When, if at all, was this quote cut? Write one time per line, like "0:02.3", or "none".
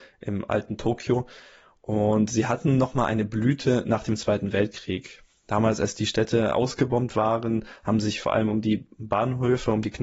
none